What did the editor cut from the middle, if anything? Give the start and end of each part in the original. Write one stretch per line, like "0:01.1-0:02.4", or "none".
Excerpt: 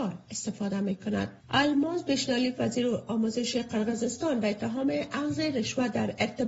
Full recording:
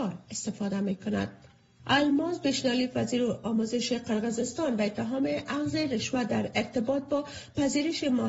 0:01.4-0:01.8